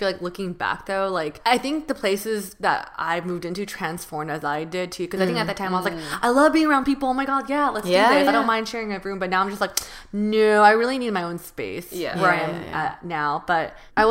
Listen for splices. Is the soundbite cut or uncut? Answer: uncut